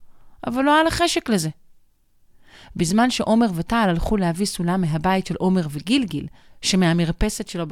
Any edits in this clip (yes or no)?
no